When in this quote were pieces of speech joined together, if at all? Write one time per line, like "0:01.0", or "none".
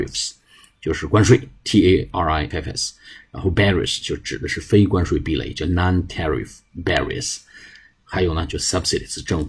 0:02.5